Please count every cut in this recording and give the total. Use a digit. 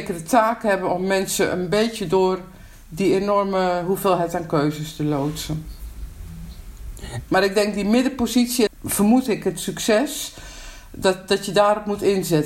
2